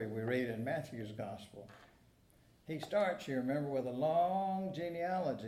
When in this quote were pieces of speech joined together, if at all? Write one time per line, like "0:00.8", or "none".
none